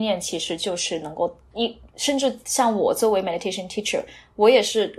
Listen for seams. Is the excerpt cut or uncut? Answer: cut